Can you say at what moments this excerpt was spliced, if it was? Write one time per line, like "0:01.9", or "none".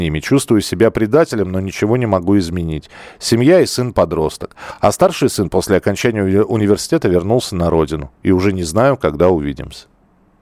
none